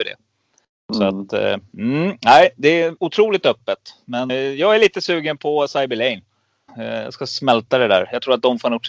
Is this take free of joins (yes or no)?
no